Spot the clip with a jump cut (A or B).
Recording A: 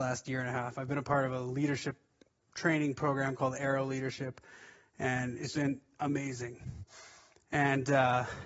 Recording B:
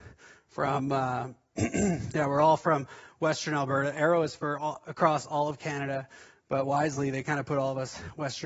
A